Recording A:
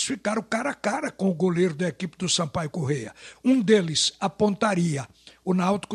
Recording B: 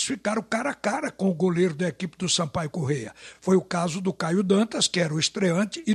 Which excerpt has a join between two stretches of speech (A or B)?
A